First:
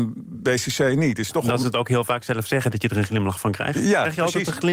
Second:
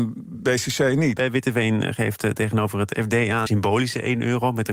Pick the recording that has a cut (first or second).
second